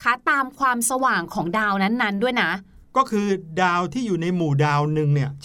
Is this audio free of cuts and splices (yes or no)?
yes